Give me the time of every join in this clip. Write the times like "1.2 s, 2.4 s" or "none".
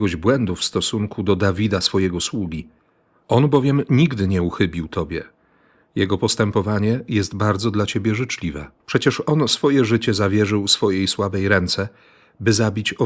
8.8 s